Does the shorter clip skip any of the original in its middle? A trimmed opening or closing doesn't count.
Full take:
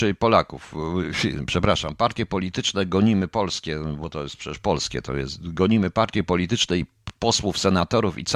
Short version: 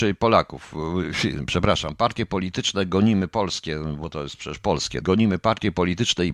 yes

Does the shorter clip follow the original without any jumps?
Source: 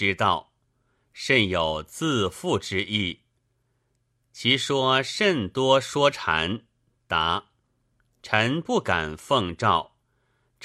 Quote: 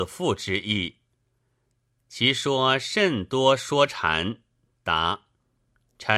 yes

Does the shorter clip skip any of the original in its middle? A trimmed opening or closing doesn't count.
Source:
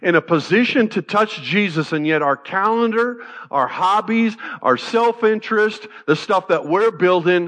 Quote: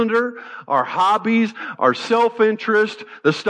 no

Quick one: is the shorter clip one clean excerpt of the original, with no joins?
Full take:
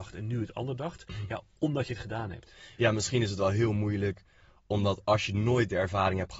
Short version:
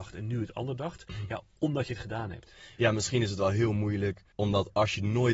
no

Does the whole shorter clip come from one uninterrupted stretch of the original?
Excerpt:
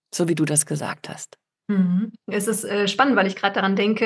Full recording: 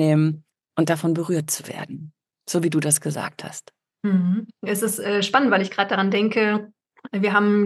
yes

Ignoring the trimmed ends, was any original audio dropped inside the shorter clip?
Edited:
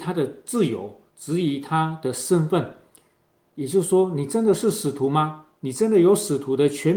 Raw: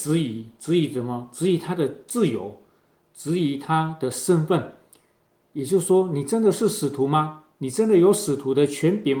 yes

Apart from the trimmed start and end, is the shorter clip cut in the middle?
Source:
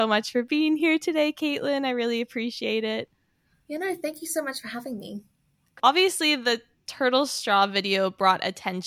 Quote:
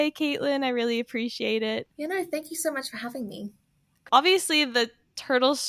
yes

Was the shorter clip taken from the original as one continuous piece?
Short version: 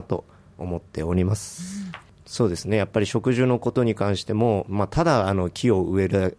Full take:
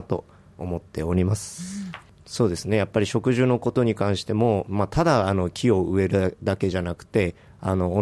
yes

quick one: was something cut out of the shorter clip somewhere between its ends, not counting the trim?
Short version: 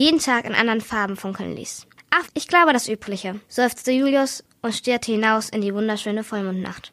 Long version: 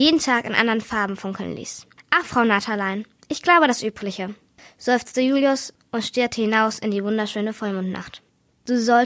yes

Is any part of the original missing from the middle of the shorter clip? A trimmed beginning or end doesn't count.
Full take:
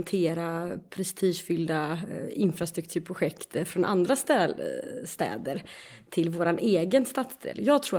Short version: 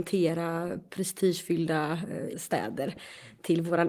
yes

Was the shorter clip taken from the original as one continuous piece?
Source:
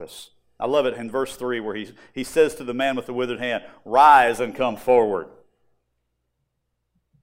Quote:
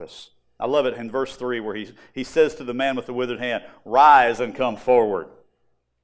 yes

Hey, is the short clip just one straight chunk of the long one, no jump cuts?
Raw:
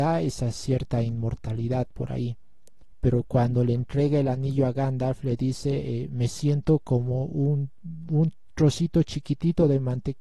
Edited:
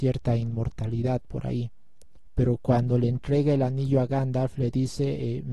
yes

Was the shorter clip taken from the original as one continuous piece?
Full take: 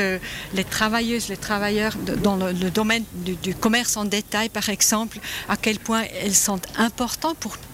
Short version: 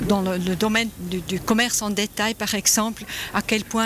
yes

